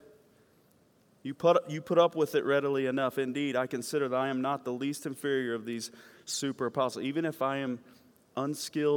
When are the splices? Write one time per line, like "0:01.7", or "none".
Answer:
none